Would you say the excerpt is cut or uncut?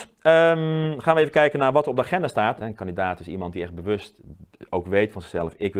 cut